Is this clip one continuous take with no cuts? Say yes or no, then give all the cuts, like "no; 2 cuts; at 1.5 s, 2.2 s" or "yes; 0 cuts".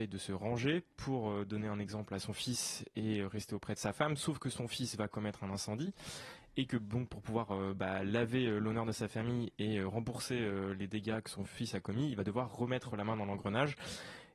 yes; 0 cuts